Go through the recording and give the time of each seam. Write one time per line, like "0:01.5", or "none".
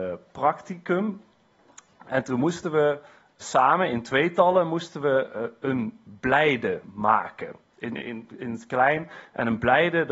none